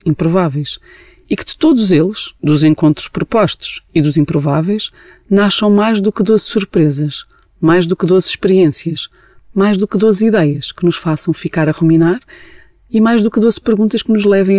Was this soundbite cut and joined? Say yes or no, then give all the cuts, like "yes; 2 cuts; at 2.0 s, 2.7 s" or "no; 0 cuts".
no; 0 cuts